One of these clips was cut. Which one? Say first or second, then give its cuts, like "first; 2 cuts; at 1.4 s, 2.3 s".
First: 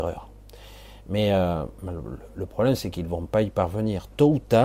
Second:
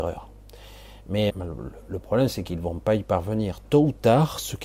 second; 1 cut; at 1.3 s